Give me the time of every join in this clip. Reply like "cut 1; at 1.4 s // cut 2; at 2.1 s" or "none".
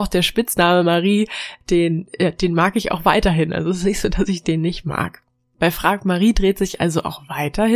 none